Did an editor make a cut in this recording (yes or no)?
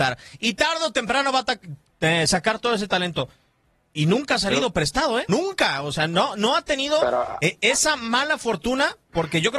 yes